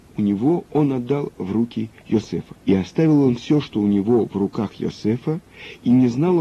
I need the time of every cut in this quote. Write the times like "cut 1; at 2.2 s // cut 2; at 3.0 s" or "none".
cut 1; at 2.6 s